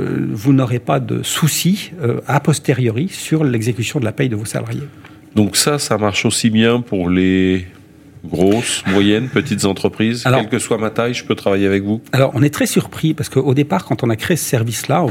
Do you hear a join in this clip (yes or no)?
yes